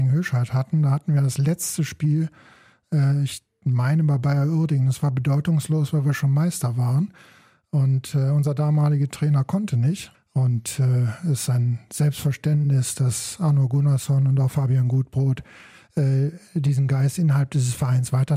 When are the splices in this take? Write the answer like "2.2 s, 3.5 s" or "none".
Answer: 10.1 s